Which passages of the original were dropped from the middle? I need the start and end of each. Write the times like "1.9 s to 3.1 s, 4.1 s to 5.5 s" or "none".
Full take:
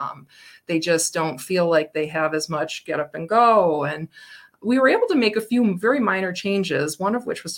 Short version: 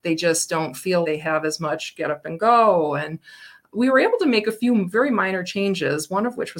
1.7 s to 1.9 s